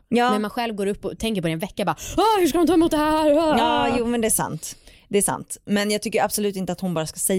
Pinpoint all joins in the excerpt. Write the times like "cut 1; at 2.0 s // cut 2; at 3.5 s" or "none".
none

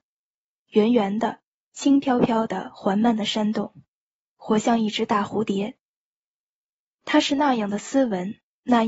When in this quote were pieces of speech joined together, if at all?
none

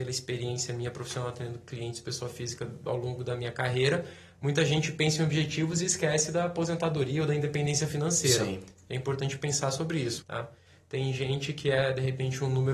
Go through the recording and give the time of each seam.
cut 1; at 10.2 s

